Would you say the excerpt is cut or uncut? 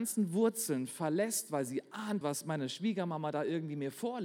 cut